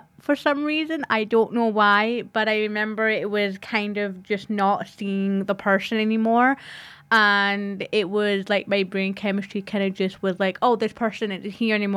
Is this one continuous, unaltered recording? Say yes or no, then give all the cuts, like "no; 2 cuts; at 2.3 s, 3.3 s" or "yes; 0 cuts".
yes; 0 cuts